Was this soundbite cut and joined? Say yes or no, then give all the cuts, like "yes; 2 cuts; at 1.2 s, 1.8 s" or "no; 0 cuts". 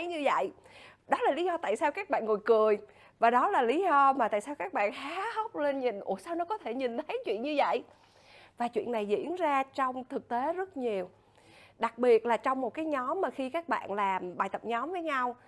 no; 0 cuts